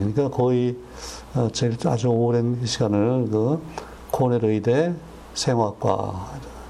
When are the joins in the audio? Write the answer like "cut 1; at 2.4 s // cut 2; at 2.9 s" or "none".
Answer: none